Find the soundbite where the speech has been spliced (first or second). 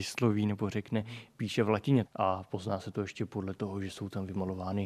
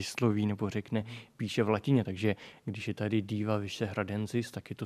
first